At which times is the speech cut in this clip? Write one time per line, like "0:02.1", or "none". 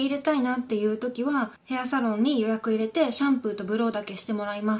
0:01.6